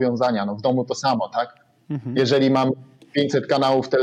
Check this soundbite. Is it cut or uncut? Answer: uncut